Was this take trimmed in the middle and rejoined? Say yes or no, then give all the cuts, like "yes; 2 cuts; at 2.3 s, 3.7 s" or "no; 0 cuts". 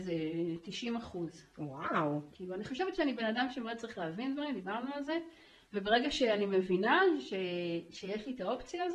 yes; 1 cut; at 2.3 s